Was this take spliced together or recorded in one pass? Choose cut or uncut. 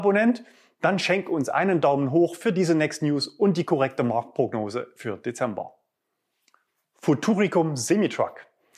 uncut